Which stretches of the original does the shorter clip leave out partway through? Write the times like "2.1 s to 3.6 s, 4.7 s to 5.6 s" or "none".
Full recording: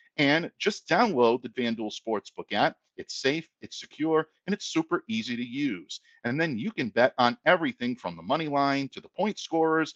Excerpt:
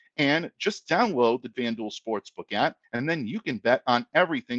2.8 s to 6.1 s